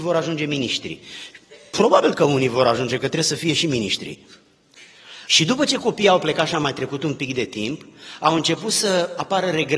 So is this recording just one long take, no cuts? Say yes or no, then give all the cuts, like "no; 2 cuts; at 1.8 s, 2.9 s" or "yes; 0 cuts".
no; 1 cut; at 5.3 s